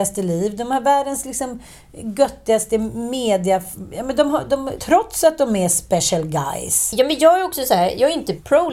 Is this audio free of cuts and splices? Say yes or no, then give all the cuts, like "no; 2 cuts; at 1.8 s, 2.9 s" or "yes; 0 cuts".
no; 1 cut; at 4.8 s